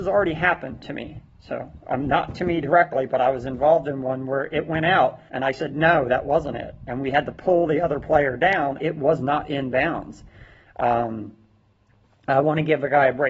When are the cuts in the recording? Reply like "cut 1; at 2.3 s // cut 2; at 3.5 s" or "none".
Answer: cut 1; at 5.3 s // cut 2; at 8.8 s